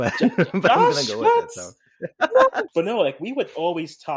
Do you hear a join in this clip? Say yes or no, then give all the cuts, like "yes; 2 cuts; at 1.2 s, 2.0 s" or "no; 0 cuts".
yes; 1 cut; at 2.7 s